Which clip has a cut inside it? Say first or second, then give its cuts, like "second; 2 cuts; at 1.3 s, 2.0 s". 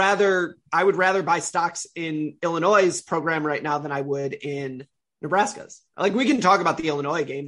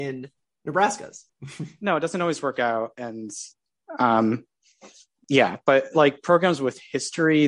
second; 1 cut; at 1.3 s